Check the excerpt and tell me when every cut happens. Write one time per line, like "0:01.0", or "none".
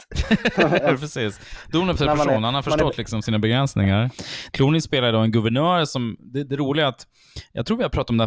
0:04.5